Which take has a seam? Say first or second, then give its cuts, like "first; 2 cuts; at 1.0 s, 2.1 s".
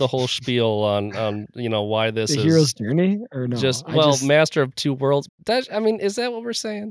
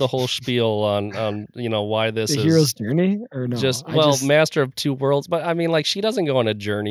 first; 1 cut; at 5.3 s